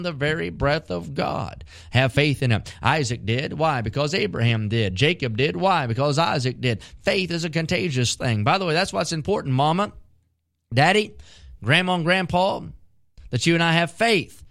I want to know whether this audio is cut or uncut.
uncut